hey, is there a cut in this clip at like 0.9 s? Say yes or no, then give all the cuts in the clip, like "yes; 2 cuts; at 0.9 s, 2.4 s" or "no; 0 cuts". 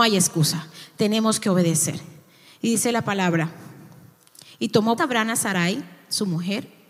no; 1 cut; at 5.0 s